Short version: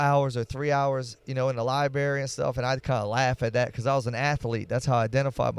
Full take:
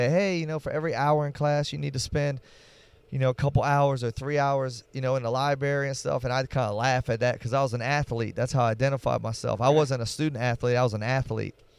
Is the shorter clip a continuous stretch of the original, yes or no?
yes